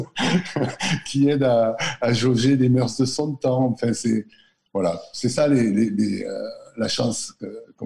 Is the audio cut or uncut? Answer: uncut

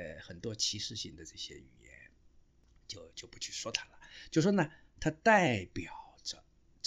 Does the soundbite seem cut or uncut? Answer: uncut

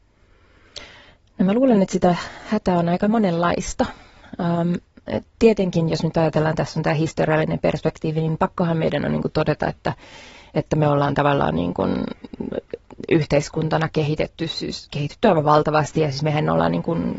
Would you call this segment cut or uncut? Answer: uncut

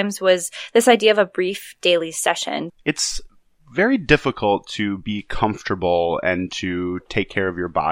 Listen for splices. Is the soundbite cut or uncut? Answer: cut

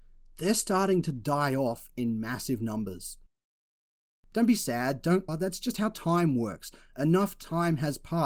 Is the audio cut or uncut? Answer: cut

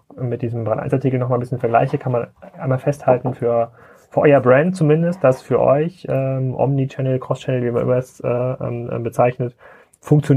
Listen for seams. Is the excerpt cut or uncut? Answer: uncut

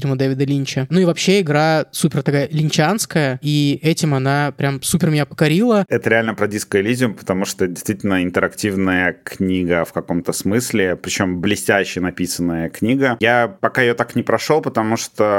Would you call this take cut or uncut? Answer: cut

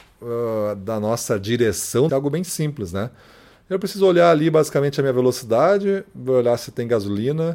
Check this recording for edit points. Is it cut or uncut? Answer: cut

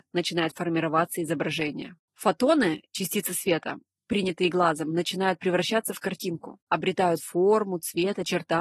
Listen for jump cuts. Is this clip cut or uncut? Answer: uncut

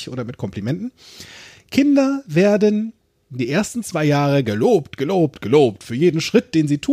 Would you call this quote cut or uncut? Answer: uncut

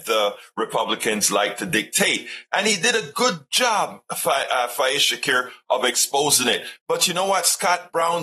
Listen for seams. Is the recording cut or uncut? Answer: uncut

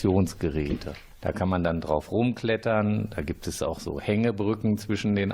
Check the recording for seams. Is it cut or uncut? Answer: uncut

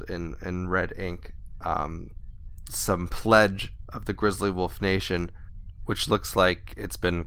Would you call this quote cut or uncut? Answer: cut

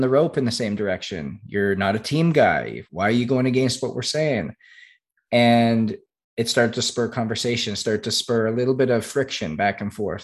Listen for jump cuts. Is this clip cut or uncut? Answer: uncut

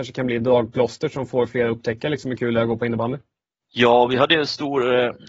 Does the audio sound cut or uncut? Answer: cut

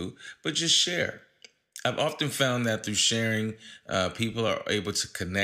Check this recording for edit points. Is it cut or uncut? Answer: uncut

